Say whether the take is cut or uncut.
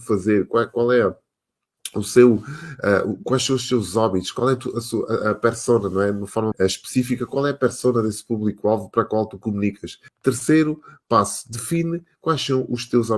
cut